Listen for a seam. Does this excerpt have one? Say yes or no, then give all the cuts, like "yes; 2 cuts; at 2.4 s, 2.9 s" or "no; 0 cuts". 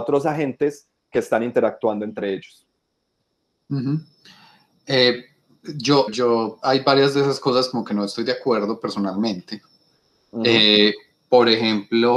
yes; 1 cut; at 6.1 s